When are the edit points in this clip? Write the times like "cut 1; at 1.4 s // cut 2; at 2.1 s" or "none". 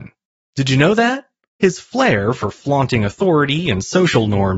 cut 1; at 1.5 s